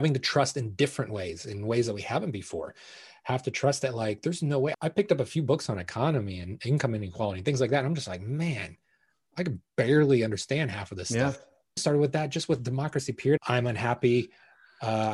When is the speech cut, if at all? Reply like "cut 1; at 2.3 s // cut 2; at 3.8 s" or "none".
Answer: cut 1; at 4.7 s // cut 2; at 11.8 s // cut 3; at 13.4 s